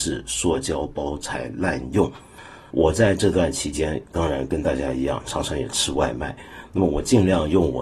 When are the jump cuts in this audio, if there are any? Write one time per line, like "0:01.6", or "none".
0:02.7